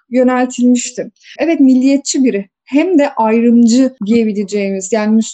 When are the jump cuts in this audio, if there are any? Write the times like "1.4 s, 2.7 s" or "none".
1.4 s